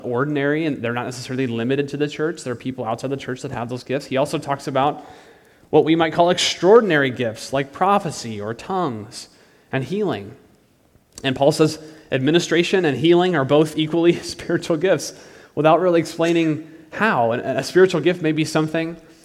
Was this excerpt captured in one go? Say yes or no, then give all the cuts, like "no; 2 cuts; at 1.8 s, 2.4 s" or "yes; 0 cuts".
yes; 0 cuts